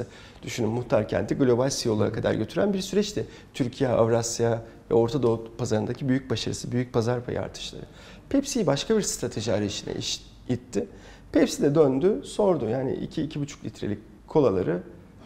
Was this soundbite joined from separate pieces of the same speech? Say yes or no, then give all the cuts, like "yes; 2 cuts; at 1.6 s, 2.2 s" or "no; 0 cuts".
no; 0 cuts